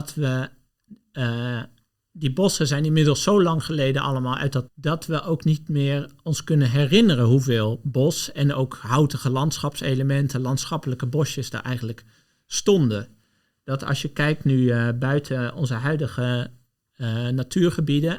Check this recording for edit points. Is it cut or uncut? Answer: cut